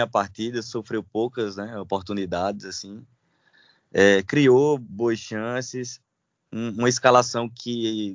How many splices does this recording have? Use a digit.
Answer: 0